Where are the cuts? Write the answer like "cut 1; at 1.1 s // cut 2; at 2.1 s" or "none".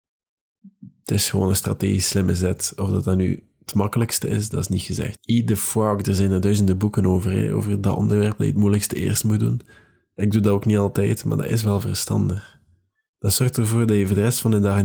cut 1; at 5.2 s